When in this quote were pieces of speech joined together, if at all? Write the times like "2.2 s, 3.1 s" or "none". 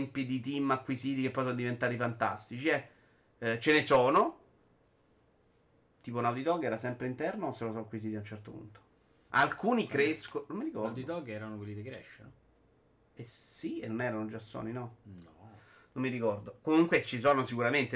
9.3 s

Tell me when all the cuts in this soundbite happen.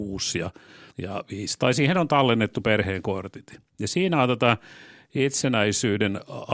0.9 s

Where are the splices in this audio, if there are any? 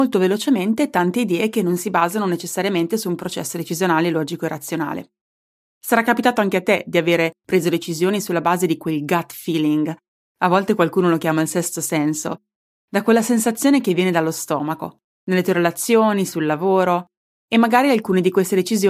none

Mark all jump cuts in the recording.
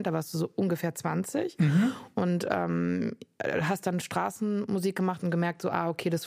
none

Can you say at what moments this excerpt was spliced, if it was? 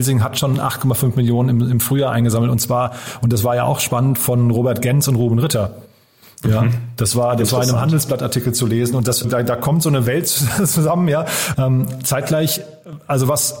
9.2 s, 11.5 s

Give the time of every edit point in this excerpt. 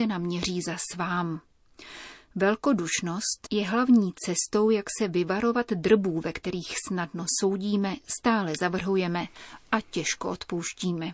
3.5 s

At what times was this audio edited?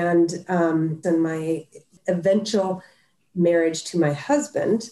1.0 s

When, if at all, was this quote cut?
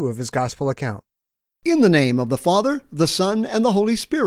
1.4 s

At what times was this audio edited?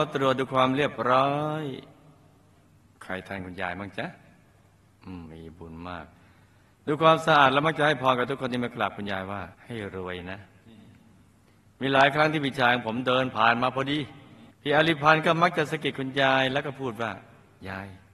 5.3 s, 9.5 s, 14.5 s

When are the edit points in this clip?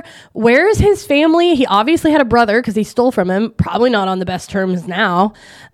none

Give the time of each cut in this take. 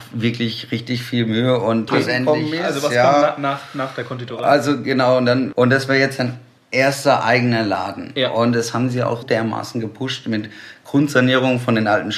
1.9 s, 5.5 s, 9.2 s

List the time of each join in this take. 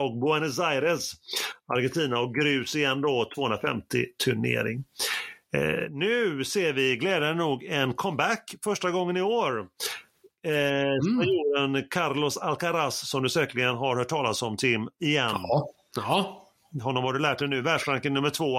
none

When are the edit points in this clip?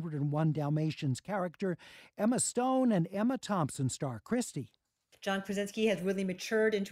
5.1 s

